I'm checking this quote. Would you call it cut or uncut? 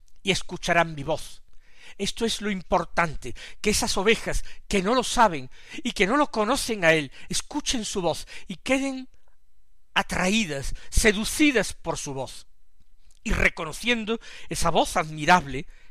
uncut